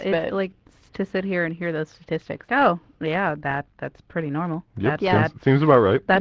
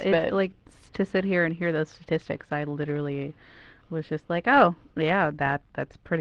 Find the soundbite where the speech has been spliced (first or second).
first